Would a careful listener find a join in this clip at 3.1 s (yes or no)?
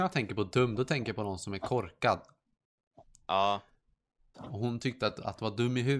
no